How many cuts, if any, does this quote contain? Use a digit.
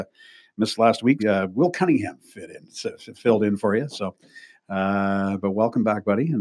1